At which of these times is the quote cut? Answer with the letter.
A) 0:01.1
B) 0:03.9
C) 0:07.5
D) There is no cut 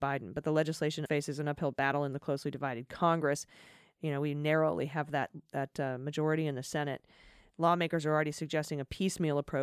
A